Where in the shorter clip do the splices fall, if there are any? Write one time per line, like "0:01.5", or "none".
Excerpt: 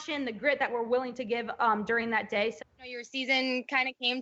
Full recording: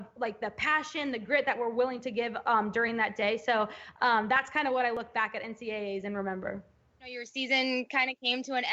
0:02.6